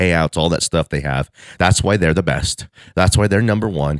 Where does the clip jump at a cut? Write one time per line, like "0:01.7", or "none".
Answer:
none